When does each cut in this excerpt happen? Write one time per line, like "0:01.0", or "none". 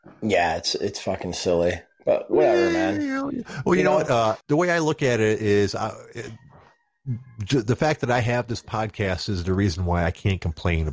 0:04.4